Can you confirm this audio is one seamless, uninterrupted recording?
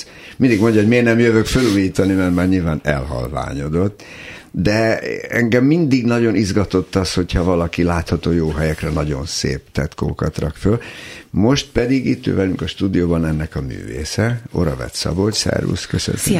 yes; 0 cuts

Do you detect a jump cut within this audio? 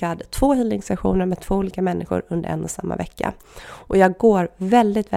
no; 0 cuts

